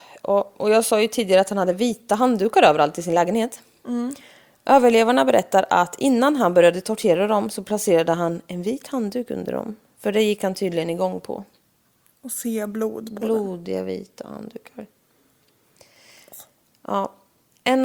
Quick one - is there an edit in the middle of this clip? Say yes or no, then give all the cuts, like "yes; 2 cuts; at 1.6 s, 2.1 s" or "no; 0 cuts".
no; 0 cuts